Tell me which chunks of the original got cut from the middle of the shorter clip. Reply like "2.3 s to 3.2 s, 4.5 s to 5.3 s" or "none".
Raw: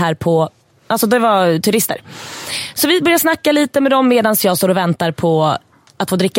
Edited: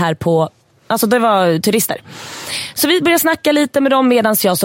none